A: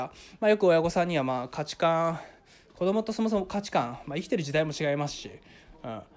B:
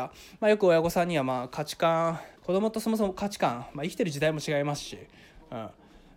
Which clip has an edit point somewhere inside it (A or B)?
B